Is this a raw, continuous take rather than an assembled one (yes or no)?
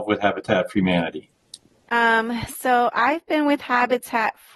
no